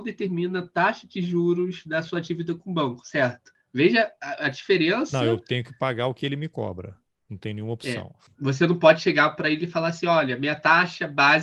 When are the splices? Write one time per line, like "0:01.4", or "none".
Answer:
none